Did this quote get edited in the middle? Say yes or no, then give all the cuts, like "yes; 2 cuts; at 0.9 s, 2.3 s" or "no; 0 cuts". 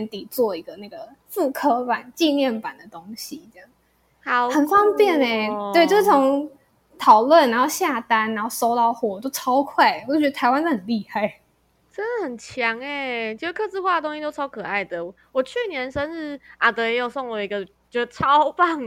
no; 0 cuts